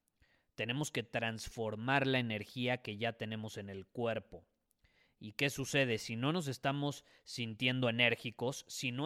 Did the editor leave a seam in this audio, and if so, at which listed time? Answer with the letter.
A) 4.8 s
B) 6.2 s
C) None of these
C